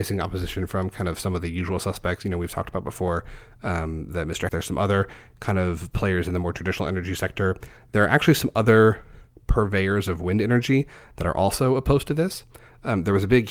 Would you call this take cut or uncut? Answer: cut